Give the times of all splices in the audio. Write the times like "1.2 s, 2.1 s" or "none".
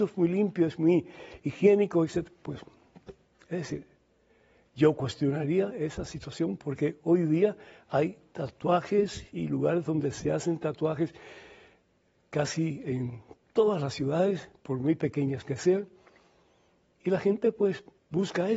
none